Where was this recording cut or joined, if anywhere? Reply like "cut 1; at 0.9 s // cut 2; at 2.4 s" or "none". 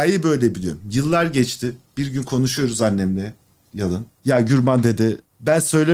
none